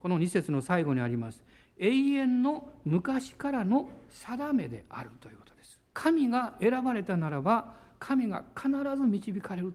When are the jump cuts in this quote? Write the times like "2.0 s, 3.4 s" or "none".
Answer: 5.9 s